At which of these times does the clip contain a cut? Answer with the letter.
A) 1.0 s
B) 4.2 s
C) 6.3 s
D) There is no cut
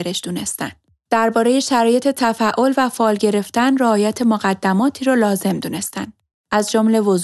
D